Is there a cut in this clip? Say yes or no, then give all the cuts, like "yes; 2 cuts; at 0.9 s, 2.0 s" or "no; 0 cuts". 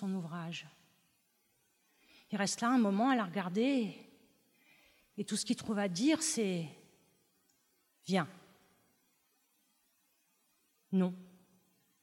no; 0 cuts